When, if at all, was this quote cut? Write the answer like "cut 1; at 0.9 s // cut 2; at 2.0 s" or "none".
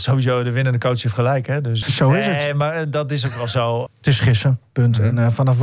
cut 1; at 1.8 s // cut 2; at 3.9 s